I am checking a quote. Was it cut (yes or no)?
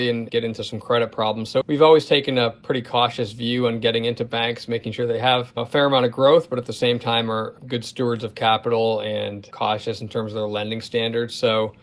no